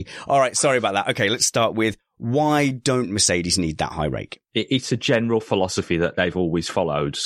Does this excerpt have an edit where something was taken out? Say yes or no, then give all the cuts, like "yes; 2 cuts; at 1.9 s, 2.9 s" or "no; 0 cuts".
yes; 1 cut; at 4.5 s